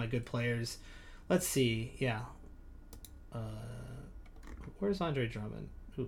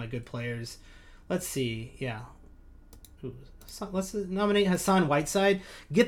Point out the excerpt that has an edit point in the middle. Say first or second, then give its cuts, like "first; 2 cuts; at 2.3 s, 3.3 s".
second; 1 cut; at 3.2 s